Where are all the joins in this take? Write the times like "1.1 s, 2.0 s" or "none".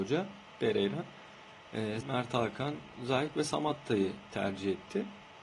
2.0 s